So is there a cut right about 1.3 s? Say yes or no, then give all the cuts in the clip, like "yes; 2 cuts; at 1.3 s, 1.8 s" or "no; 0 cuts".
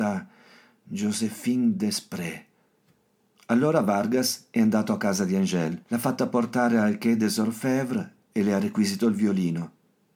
no; 2 cuts; at 3.4 s, 5.8 s